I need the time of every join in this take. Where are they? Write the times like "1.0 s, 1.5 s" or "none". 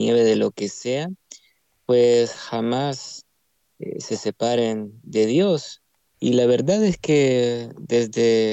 6.1 s